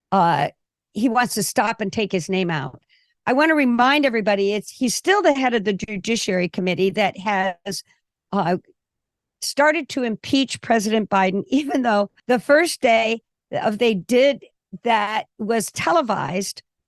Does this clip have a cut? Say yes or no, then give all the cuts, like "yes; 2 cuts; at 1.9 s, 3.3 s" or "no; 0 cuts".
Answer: yes; 2 cuts; at 12.2 s, 15.3 s